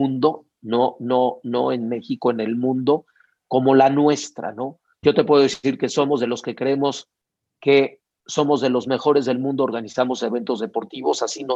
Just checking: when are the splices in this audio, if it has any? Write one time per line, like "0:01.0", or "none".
0:05.0